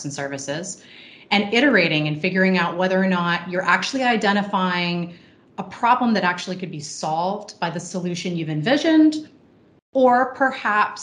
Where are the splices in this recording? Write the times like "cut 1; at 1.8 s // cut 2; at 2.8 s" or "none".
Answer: none